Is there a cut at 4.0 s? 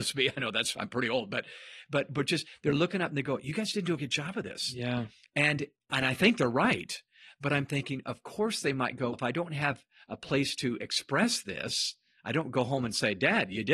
yes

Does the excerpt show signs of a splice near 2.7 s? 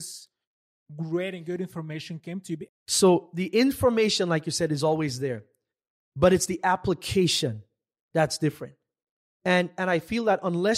yes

